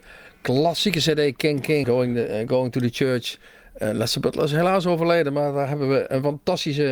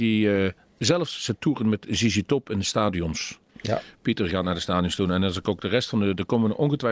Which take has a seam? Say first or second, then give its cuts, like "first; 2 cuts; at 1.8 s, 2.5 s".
first; 1 cut; at 1.8 s